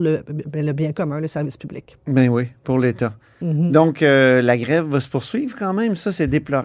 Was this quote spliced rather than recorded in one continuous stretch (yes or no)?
no